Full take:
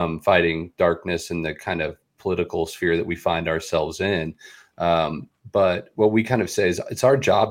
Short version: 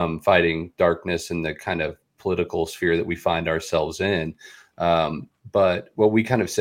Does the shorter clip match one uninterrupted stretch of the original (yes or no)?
yes